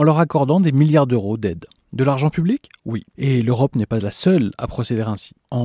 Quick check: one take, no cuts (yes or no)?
yes